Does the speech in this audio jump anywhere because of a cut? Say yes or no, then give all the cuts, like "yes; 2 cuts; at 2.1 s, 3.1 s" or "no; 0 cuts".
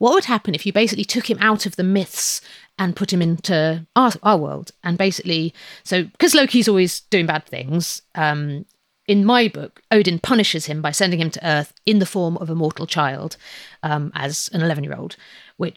no; 0 cuts